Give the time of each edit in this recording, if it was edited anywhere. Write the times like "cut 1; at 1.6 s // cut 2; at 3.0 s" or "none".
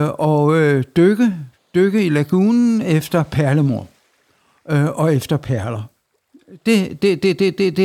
none

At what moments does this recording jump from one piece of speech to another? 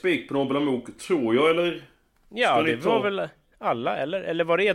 none

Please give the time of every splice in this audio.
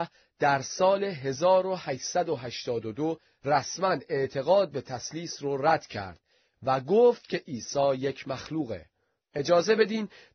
none

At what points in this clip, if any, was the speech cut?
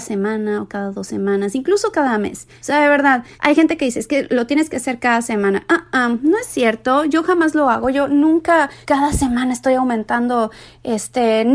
none

